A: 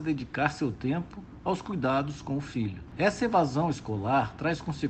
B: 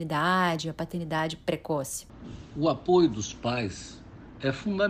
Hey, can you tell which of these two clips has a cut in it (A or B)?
A